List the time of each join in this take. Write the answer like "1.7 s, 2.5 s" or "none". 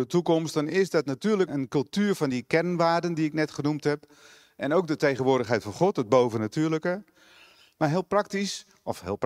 1.5 s